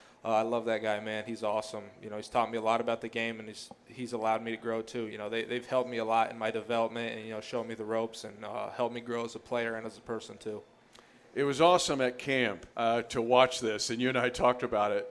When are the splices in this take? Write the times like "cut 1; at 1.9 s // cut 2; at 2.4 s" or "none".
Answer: cut 1; at 5.1 s // cut 2; at 12.7 s